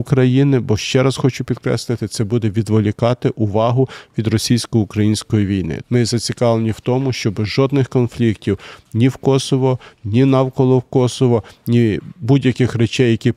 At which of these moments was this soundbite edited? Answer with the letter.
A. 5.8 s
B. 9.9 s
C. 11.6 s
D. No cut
A